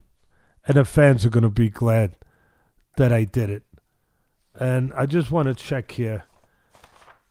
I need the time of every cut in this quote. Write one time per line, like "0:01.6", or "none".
none